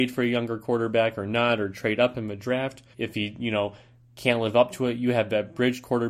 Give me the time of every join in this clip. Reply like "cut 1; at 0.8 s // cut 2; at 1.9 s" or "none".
cut 1; at 2.9 s